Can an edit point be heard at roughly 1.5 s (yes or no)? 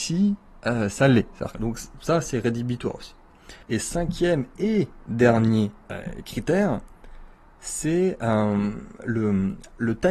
yes